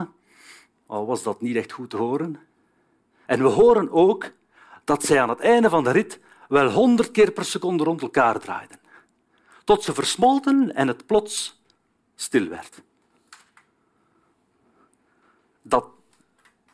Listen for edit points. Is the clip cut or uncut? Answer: cut